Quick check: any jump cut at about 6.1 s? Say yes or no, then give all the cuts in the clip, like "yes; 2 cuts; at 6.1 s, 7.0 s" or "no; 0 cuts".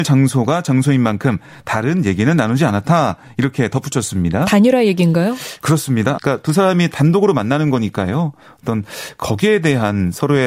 yes; 1 cut; at 6.1 s